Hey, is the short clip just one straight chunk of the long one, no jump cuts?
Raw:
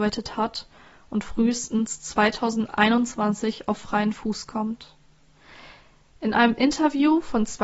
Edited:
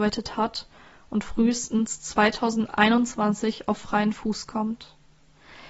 yes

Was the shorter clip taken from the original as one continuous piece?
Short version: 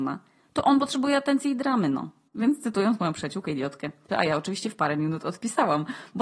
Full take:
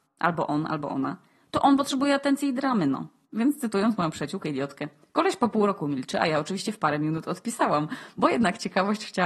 no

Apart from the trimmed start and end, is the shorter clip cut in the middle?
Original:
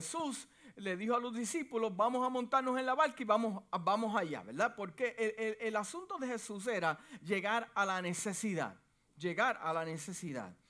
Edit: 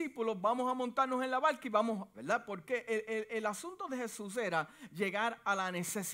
yes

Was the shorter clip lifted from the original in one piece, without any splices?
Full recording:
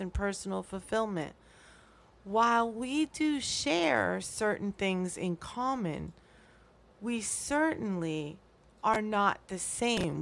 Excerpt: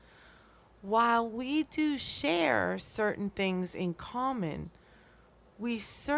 yes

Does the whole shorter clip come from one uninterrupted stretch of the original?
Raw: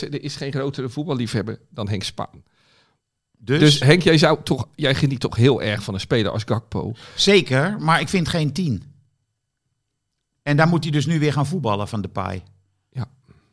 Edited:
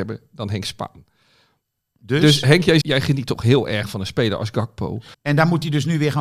no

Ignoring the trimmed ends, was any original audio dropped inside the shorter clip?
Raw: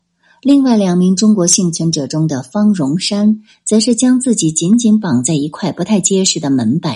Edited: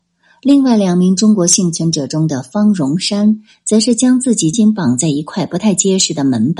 yes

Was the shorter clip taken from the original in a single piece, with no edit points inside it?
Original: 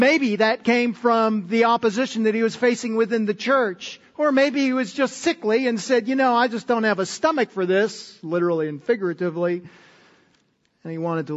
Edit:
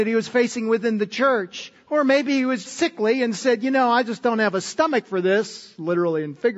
no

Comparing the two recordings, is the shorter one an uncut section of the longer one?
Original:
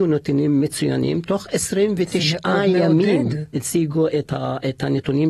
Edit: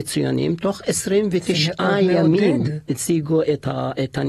yes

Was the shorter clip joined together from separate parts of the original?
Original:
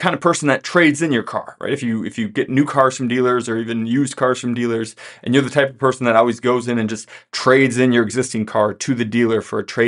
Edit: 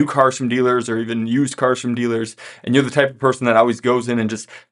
no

